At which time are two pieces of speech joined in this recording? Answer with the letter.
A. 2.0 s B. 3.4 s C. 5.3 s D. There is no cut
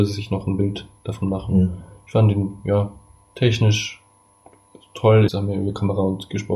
C